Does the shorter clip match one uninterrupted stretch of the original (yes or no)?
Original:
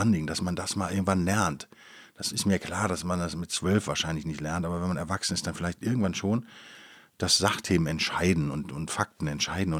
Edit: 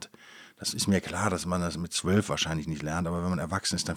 yes